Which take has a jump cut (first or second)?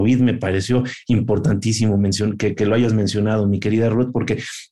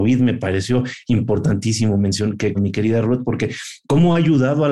second